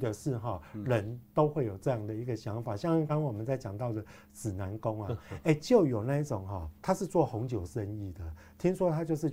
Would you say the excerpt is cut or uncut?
cut